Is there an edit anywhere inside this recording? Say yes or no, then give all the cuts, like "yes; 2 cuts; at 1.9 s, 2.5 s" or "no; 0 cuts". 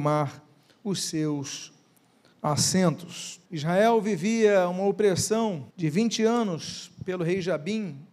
yes; 2 cuts; at 3.5 s, 5.7 s